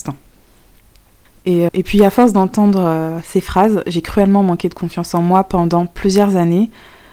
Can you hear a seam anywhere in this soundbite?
yes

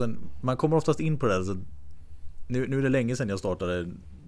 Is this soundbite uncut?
yes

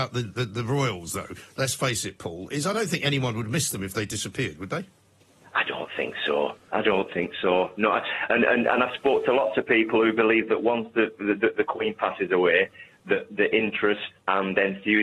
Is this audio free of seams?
yes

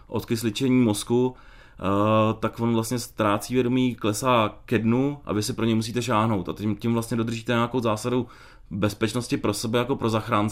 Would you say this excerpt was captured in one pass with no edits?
yes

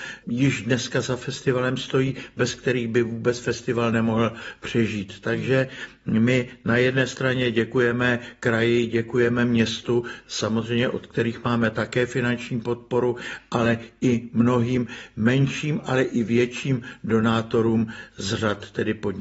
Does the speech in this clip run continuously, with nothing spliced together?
yes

